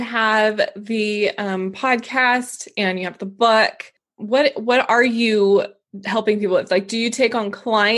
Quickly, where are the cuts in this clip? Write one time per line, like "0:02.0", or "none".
none